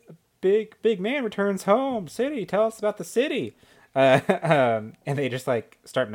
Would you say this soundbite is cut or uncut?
uncut